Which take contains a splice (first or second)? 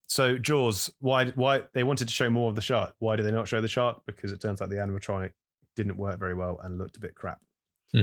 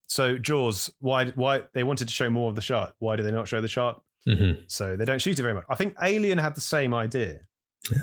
second